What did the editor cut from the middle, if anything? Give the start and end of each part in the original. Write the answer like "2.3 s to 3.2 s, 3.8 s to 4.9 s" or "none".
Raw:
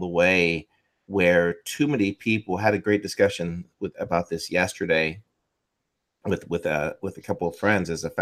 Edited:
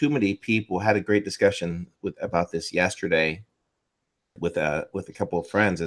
6.1 s to 6.4 s